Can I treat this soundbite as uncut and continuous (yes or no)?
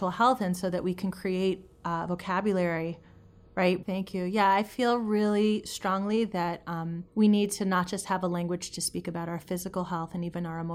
no